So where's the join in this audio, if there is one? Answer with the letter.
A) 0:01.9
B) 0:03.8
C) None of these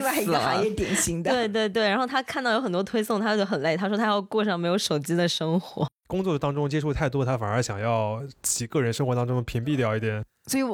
C